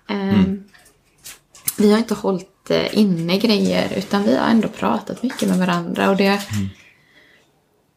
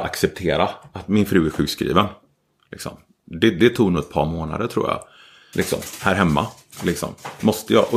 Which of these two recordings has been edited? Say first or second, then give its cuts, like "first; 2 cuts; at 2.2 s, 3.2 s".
second; 1 cut; at 5.5 s